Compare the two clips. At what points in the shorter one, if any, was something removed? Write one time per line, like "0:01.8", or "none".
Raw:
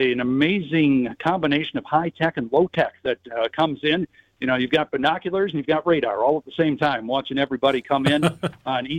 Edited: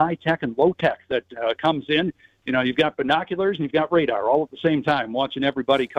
none

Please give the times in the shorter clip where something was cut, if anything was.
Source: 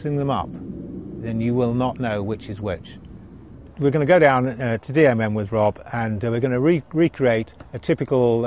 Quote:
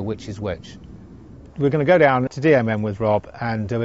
0:02.3

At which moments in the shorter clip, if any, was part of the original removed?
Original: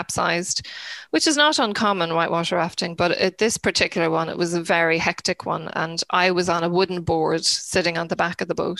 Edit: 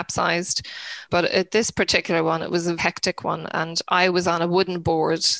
0:01.1
0:02.8

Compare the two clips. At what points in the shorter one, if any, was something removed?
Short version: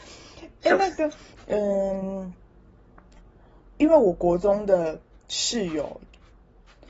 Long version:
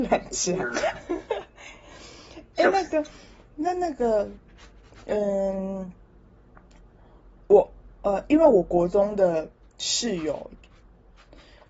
0:01.3
0:03.8

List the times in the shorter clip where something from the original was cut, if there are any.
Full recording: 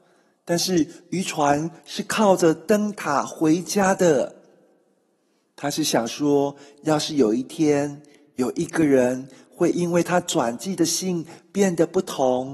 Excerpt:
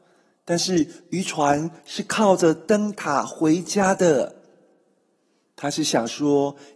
none

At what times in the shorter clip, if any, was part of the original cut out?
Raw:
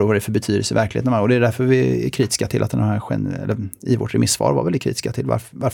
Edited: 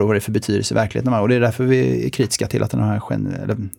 none

